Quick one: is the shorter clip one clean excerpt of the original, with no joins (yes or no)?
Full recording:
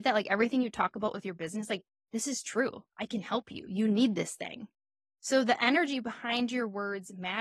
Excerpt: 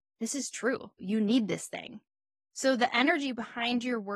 no